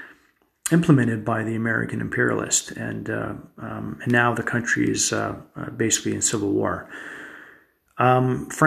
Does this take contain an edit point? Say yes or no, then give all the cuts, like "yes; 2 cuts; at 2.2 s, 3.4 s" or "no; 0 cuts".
no; 0 cuts